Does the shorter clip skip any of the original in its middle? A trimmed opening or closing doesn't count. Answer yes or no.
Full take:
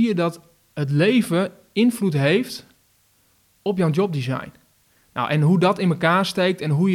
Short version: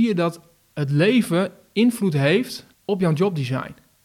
yes